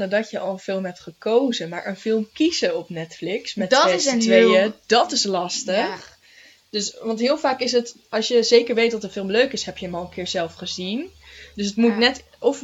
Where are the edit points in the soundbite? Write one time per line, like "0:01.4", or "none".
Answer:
none